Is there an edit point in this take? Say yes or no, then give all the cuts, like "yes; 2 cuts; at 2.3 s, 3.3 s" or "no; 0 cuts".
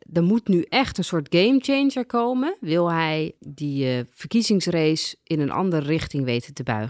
yes; 1 cut; at 3.4 s